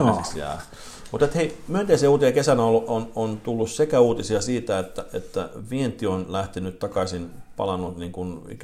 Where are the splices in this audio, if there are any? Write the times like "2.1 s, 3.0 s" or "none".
none